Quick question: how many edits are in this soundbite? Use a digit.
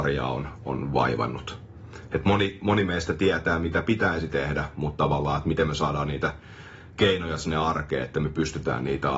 0